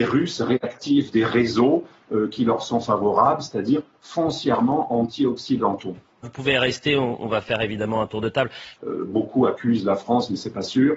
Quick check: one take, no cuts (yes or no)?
no